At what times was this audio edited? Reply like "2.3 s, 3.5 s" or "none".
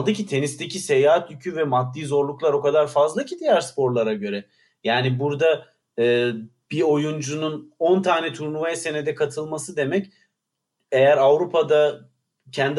none